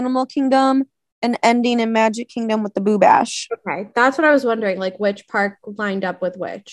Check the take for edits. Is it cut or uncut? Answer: uncut